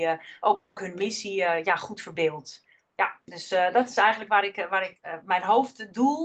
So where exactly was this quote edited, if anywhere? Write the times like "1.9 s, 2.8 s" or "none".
none